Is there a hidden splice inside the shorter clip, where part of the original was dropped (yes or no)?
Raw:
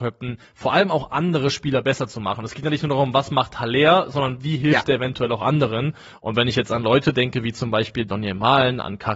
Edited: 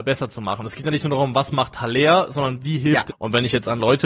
yes